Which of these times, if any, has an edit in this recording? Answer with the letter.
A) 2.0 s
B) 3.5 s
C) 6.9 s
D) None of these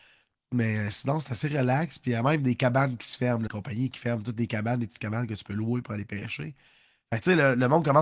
B